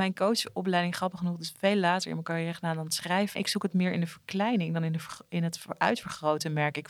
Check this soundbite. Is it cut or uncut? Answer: cut